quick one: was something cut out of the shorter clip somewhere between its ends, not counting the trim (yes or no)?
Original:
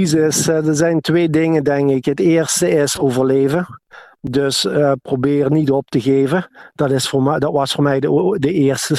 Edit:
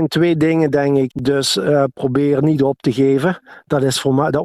yes